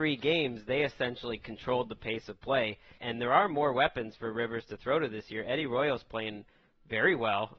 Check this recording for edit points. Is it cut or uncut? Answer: cut